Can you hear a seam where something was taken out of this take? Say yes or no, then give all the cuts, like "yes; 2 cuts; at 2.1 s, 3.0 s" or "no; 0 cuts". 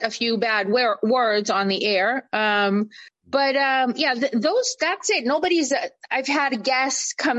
no; 0 cuts